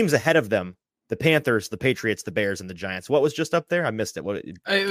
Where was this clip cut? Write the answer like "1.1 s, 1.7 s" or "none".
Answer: 1.7 s